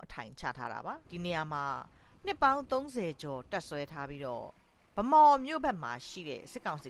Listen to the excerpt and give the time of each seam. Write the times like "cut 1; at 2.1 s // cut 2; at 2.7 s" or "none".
cut 1; at 1.0 s